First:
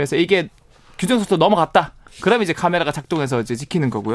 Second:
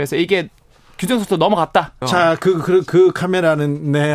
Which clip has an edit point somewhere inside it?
second; 1 cut; at 2.0 s

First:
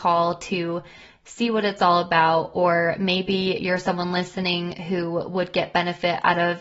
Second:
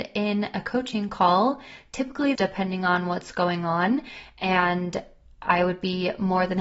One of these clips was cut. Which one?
second; 1 cut; at 2.4 s

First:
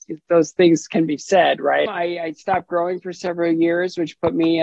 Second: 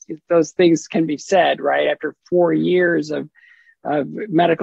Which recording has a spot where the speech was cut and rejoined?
first; 1 cut; at 1.9 s

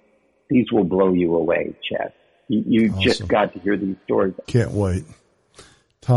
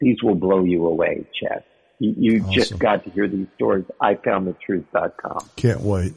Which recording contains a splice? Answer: first; 1 cut; at 4.4 s

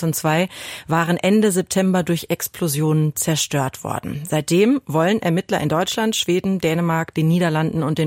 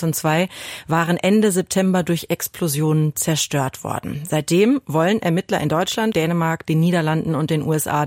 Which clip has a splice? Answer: second; 1 cut; at 6.1 s

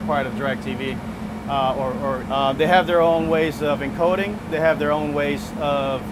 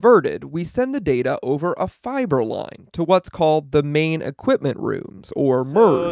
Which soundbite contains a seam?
first; 2 cuts; at 2.2 s, 4.5 s

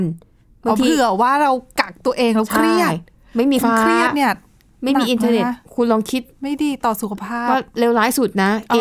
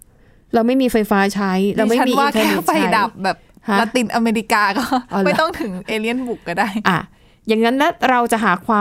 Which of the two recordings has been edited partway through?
first; 1 cut; at 3.6 s

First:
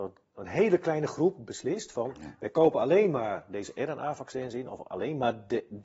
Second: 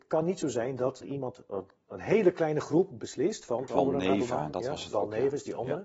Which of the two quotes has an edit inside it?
second; 2 cuts; at 1.0 s, 3.7 s

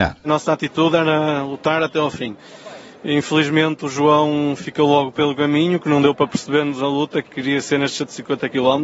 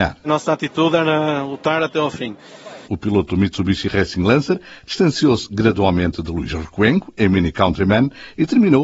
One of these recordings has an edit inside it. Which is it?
second; 1 cut; at 2.9 s

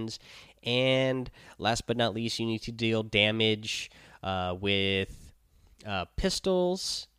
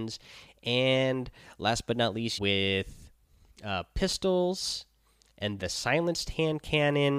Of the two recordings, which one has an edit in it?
second; 2 cuts; at 2.4 s, 5.6 s

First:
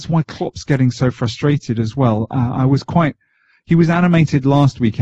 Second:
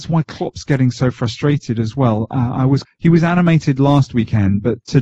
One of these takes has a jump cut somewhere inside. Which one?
second; 1 cut; at 2.8 s

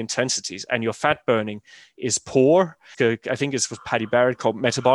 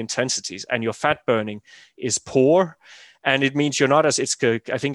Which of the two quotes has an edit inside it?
first; 1 cut; at 2.9 s

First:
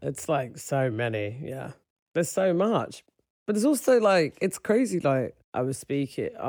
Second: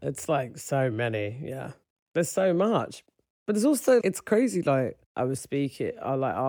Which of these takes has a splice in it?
second; 1 cut; at 4.0 s

